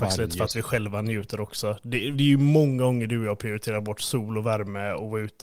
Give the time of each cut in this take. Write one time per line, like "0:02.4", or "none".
0:02.1